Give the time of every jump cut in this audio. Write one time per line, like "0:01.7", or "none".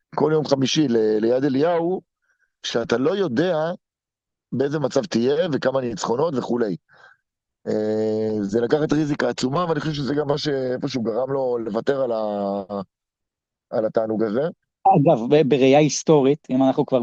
none

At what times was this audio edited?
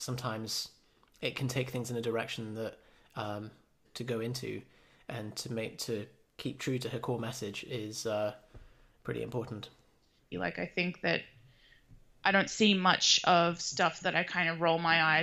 0:03.8
0:10.3

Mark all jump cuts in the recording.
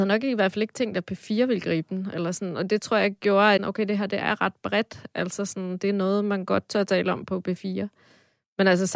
0:03.6

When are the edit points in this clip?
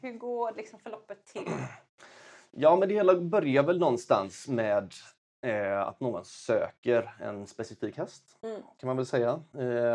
none

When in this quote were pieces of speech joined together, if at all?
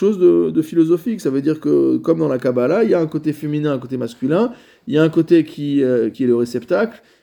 0:06.1

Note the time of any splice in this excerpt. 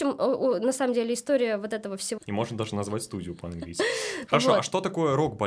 0:02.2
0:04.3

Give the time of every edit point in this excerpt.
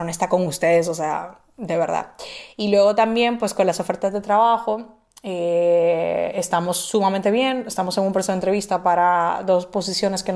none

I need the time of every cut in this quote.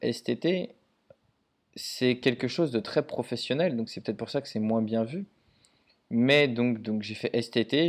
none

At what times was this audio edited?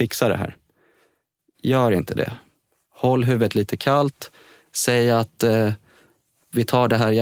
none

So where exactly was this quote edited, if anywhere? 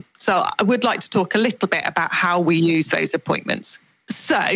none

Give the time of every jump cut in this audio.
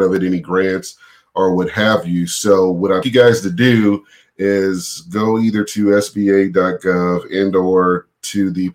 0:03.0

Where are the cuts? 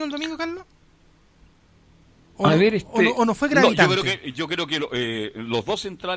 none

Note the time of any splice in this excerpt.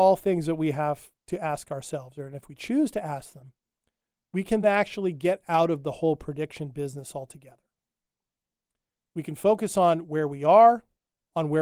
0:04.6

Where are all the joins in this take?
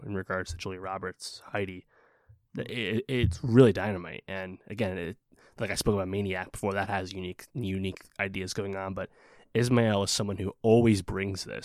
none

